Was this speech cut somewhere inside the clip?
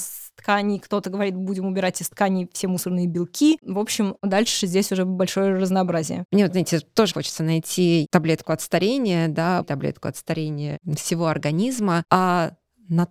yes; 2 cuts; at 7.1 s, 9.6 s

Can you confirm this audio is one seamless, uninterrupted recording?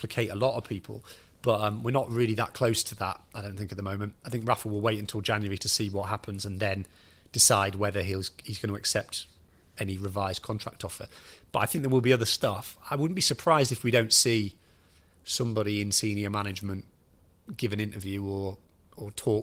yes; 0 cuts

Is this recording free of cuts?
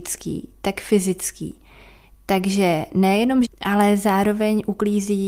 no; 1 cut; at 3.4 s

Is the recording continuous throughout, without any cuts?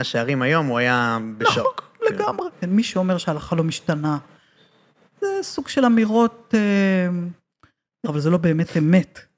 no; 2 cuts; at 2.5 s, 8.1 s

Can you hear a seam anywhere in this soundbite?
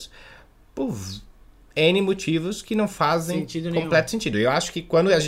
no; 0 cuts

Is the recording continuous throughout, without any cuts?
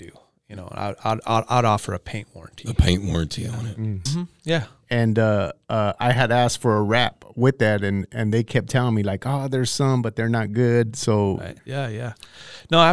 no; 2 cuts; at 4.1 s, 11.6 s

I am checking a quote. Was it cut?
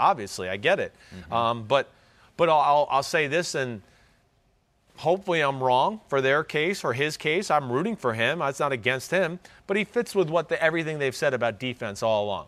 no; 0 cuts

